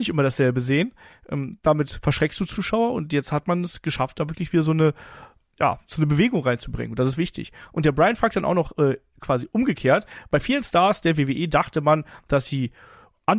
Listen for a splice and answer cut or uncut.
uncut